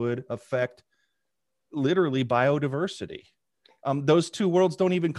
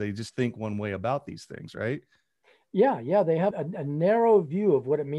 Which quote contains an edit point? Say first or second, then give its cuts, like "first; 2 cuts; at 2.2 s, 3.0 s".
second; 1 cut; at 3.5 s